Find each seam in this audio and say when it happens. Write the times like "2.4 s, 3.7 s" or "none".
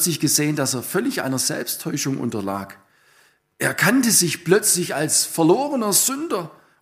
none